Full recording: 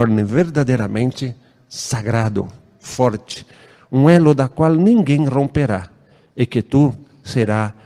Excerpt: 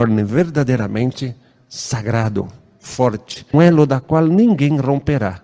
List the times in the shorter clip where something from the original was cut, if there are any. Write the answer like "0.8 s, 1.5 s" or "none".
3.5 s